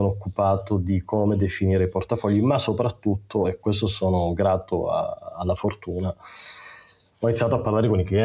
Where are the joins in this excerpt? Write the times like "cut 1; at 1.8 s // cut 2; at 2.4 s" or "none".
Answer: none